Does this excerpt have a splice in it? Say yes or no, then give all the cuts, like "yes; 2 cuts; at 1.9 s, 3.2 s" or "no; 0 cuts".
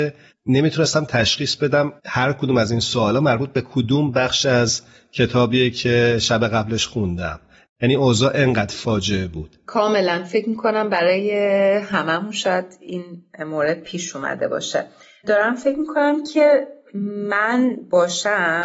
yes; 1 cut; at 2.0 s